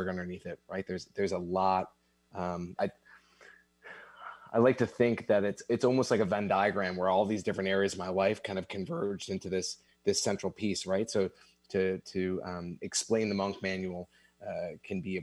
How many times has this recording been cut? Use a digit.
1